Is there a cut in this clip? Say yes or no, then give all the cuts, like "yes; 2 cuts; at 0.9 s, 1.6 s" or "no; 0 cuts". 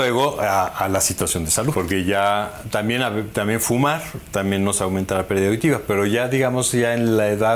yes; 1 cut; at 1.7 s